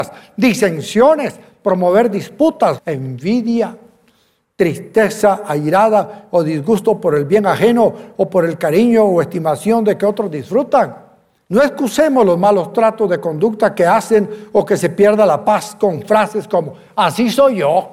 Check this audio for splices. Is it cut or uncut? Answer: cut